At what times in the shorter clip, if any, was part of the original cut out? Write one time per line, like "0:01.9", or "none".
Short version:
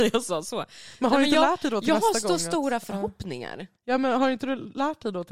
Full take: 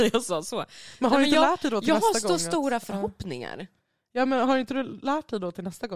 0:03.8